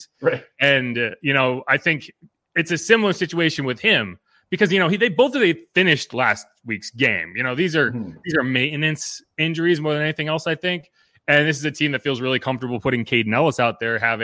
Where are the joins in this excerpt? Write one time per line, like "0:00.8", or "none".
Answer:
none